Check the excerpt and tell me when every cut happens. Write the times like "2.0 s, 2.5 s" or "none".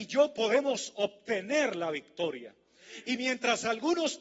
none

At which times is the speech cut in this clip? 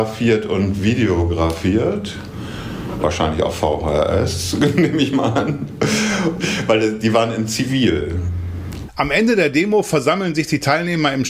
6.4 s, 8.9 s

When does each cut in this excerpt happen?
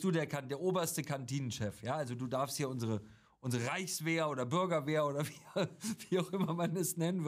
none

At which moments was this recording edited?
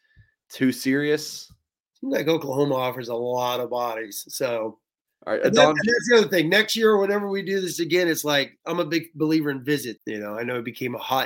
10.0 s

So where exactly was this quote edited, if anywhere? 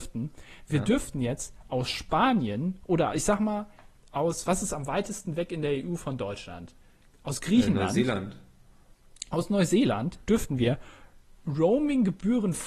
none

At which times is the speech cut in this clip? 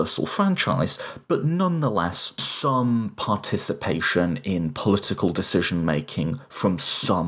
none

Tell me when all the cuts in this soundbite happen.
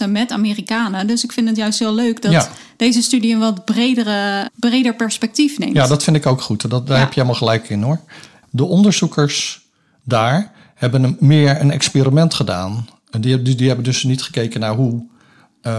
4.5 s, 8.4 s

